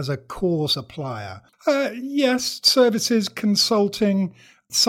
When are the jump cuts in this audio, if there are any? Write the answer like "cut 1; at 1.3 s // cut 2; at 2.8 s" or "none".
cut 1; at 1.5 s